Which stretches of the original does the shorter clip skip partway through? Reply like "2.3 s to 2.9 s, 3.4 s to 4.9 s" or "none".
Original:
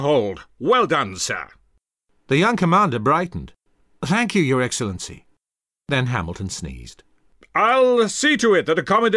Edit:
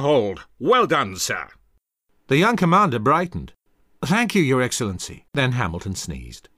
5.3 s to 5.8 s